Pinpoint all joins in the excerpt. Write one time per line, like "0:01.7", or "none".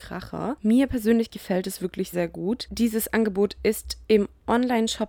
0:02.1